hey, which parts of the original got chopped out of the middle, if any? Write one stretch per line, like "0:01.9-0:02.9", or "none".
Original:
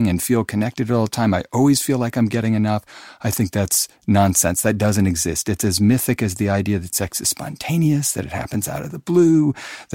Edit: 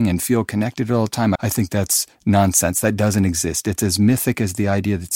0:01.4-0:03.2